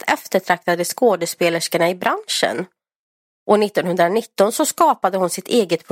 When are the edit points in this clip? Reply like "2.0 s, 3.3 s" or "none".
3.3 s